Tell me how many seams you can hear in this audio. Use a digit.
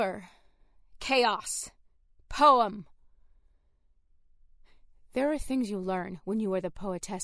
0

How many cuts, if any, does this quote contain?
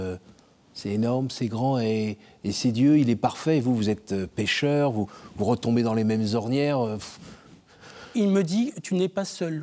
0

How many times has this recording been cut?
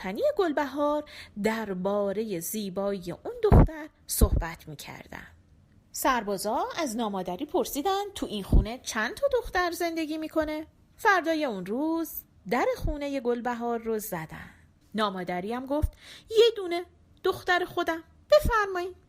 3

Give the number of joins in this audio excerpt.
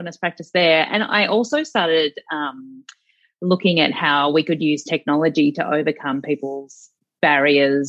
0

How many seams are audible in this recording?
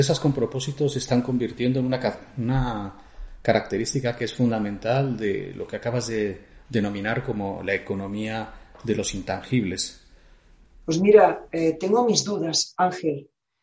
1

